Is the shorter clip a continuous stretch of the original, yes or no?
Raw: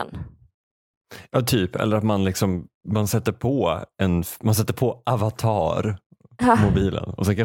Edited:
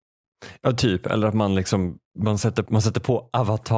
no